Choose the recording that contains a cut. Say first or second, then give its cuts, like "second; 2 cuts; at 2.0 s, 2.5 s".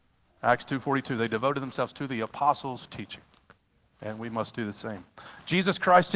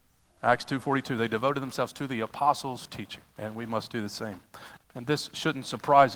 second; 2 cuts; at 3.3 s, 4.8 s